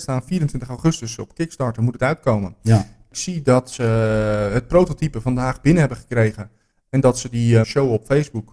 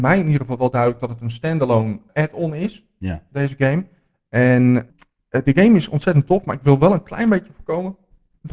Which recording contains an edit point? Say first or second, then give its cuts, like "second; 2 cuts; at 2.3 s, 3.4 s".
first; 1 cut; at 7.6 s